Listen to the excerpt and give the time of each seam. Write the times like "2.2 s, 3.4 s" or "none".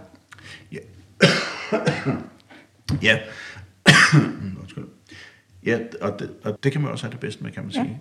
6.6 s

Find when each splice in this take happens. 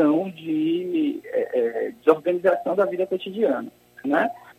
none

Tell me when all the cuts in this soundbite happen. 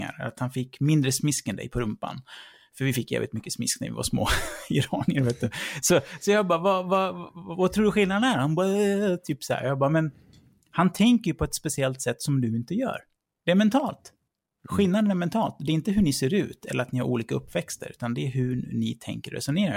none

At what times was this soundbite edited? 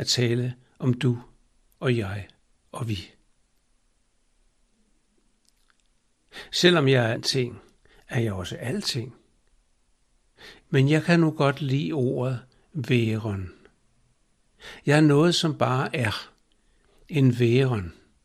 7.1 s, 10.6 s

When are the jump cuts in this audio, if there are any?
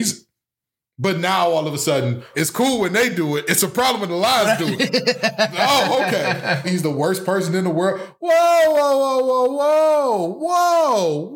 2.3 s, 6.6 s

